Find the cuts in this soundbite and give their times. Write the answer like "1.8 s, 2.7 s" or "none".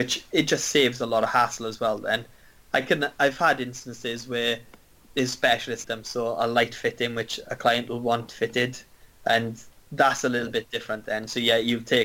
5.8 s